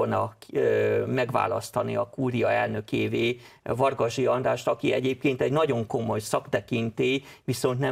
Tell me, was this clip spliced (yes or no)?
no